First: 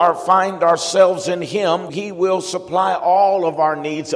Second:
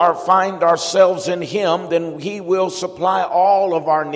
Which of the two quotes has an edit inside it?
first; 1 cut; at 1.9 s

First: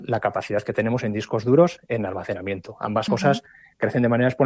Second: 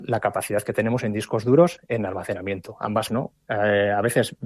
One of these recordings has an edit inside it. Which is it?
second; 1 cut; at 3.1 s

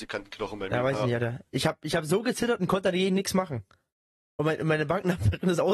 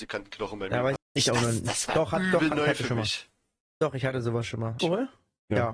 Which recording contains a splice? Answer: second; 2 cuts; at 1.0 s, 4.8 s

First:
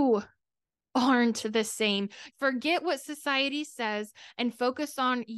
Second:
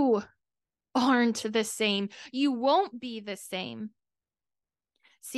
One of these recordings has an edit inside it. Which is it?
first; 1 cut; at 2.3 s

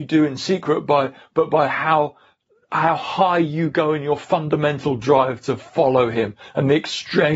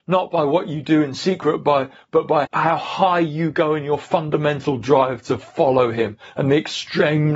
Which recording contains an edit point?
second; 1 cut; at 2.5 s

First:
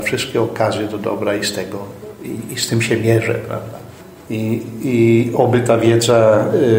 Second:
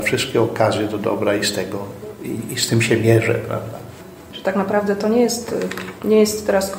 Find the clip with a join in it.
first; 1 cut; at 4.3 s

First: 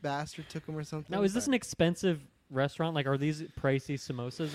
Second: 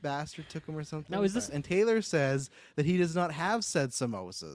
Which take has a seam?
second; 1 cut; at 1.5 s

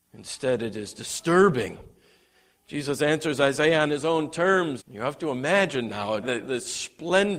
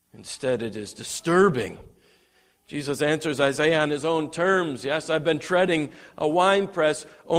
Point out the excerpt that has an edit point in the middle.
first; 2 cuts; at 4.8 s, 6.2 s

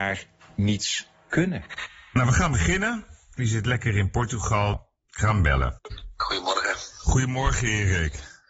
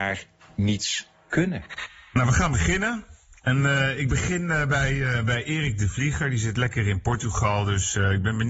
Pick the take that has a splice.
first; 3 cuts; at 3.4 s, 4.7 s, 5.9 s

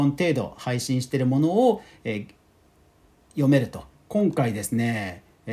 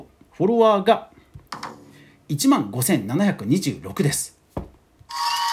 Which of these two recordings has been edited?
first; 1 cut; at 3.9 s

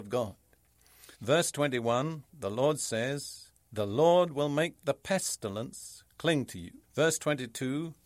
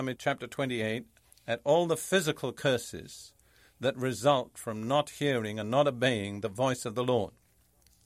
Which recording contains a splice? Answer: first; 3 cuts; at 1.1 s, 3.6 s, 6.8 s

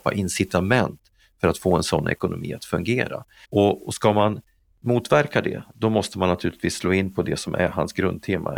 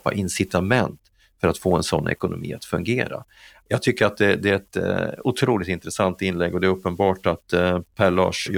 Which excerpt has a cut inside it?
first; 1 cut; at 3.4 s

